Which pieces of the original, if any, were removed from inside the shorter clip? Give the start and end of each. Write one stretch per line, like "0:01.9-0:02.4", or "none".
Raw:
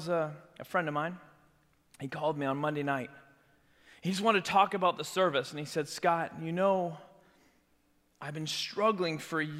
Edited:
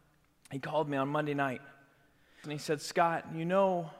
0:03.9-0:05.5